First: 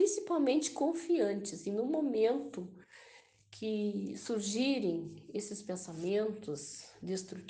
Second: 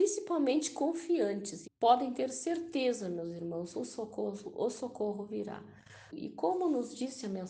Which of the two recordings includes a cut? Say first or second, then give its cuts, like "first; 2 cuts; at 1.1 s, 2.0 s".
second; 2 cuts; at 1.6 s, 6.1 s